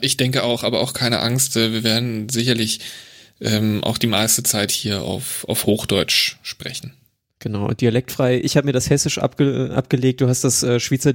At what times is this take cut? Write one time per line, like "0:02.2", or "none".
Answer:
none